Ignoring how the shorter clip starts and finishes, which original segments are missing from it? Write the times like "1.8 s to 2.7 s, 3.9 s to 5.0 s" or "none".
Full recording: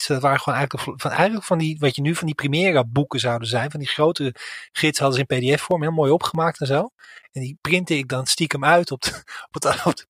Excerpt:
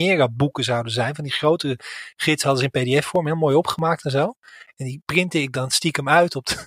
none